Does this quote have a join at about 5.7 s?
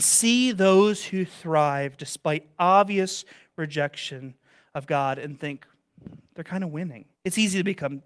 no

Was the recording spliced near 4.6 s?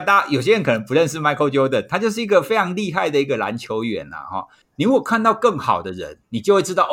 yes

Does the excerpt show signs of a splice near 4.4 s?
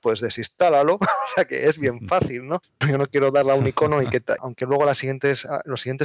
yes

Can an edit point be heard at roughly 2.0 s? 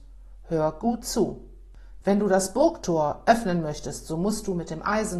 yes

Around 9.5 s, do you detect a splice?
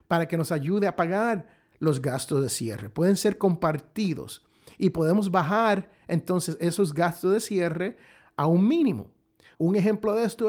yes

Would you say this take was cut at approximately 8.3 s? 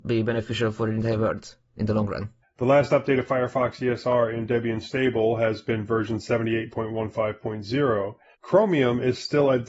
yes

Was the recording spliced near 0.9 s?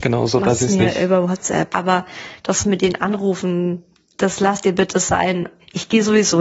no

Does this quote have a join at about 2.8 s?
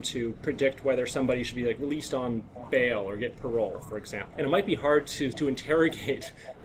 no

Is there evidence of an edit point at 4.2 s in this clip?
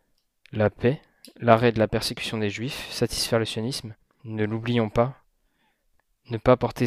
yes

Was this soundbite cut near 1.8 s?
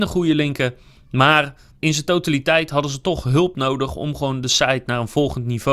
yes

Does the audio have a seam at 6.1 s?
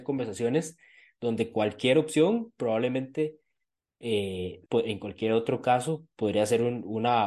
no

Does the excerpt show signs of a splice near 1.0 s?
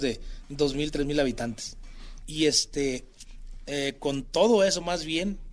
no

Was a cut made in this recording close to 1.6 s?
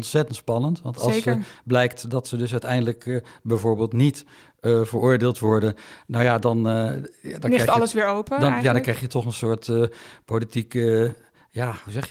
no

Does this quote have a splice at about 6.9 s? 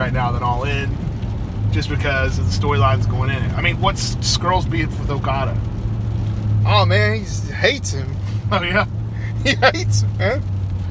no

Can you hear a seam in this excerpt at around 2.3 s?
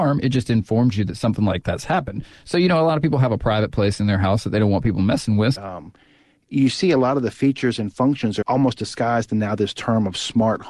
no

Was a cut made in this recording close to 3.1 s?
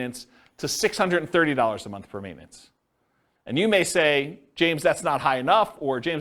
no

